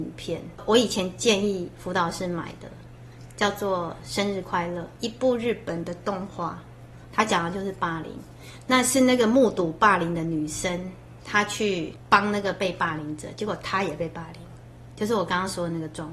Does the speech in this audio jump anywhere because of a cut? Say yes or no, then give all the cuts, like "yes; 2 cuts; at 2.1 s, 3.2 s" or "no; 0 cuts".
no; 0 cuts